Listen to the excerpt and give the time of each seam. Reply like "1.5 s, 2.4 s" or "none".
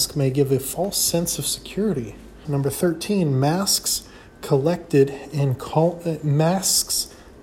2.4 s